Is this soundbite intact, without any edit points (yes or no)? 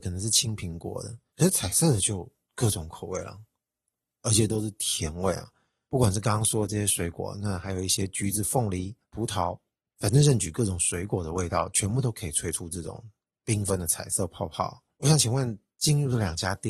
no